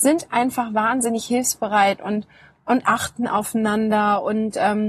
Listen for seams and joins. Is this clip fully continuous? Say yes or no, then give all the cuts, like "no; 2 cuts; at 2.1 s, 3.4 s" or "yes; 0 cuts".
yes; 0 cuts